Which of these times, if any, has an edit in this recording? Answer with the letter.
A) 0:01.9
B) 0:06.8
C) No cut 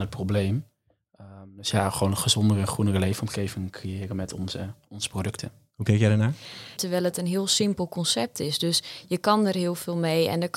B